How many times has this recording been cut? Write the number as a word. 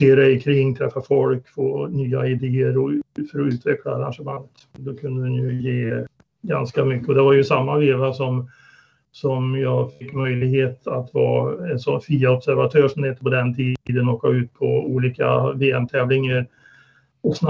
one